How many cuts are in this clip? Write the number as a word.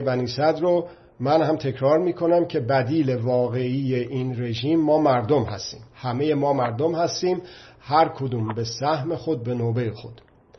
one